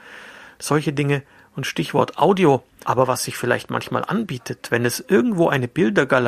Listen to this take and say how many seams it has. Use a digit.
1